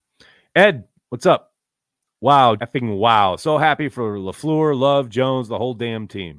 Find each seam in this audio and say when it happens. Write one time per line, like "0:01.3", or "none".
0:02.6